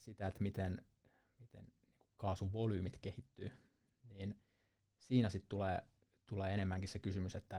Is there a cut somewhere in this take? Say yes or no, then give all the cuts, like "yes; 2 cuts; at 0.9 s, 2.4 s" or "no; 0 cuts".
no; 0 cuts